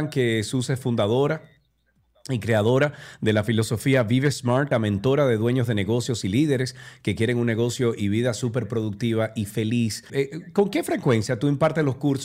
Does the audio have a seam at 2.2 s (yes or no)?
no